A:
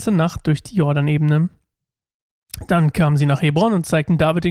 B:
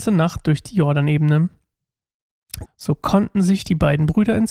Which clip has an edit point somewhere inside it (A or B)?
B